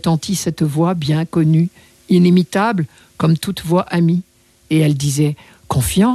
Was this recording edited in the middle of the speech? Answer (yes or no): no